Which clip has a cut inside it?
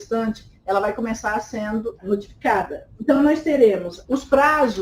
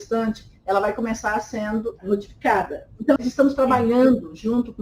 second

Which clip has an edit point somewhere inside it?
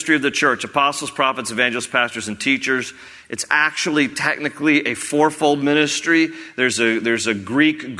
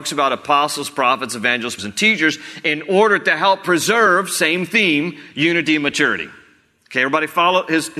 second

